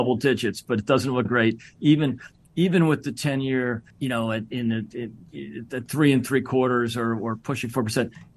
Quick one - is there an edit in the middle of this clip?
yes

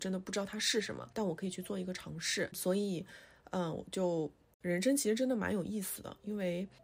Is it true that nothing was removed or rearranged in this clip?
no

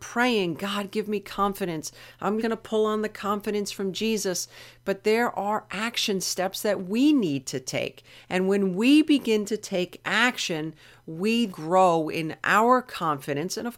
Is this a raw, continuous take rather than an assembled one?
no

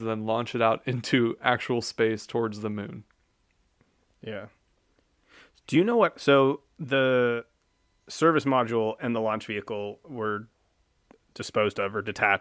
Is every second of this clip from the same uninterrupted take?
yes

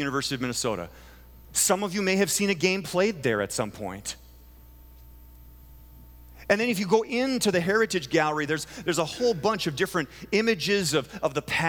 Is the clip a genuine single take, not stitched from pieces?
yes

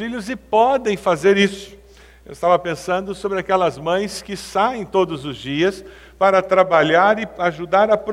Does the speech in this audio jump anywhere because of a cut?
no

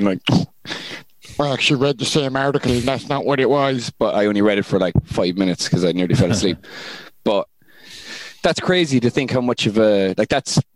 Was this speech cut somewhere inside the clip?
no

